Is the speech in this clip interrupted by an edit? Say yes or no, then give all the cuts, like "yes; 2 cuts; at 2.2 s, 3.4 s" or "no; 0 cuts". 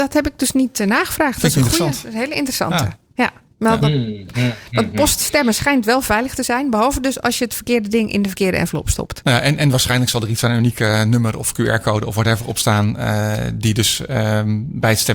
no; 0 cuts